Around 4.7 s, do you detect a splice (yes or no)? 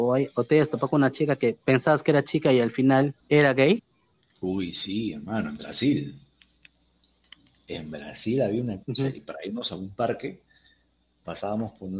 no